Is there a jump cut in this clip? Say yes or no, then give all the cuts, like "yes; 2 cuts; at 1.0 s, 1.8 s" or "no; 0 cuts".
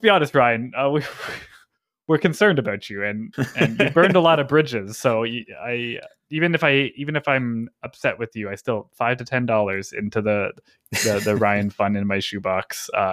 no; 0 cuts